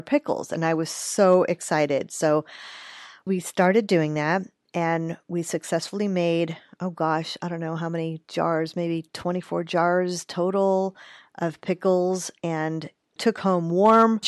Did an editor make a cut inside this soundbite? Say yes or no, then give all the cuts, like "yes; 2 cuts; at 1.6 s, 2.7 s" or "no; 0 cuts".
no; 0 cuts